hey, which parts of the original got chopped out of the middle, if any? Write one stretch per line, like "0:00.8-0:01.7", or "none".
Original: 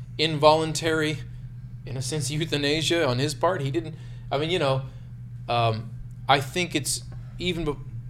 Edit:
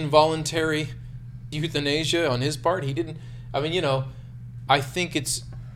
0:01.8-0:02.3
0:05.4-0:06.3